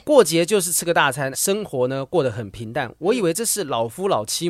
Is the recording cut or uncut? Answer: cut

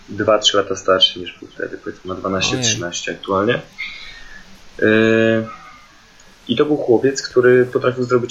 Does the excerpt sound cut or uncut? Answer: uncut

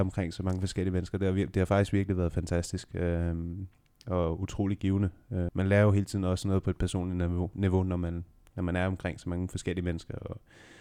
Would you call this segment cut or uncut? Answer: cut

